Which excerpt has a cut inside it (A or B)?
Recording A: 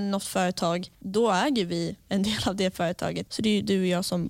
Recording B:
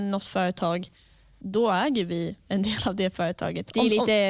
A